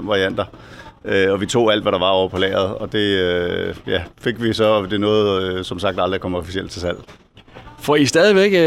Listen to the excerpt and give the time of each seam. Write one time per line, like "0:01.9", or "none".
0:04.1